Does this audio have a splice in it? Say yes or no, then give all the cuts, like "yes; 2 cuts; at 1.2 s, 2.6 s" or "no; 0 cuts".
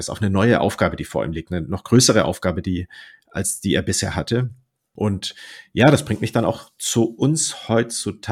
no; 0 cuts